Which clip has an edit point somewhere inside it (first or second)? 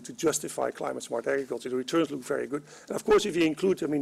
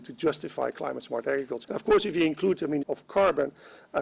second